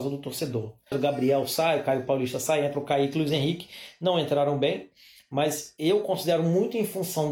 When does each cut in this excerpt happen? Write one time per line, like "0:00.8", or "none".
0:00.9